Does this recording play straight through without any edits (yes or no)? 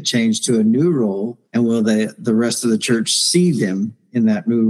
no